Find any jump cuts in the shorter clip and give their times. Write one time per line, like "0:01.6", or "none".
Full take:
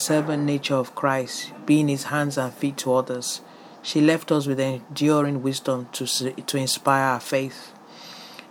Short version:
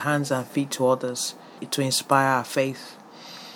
0:01.6